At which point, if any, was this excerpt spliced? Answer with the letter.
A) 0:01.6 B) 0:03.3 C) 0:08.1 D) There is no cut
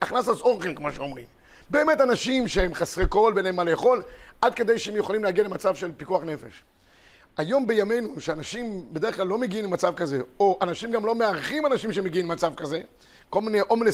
D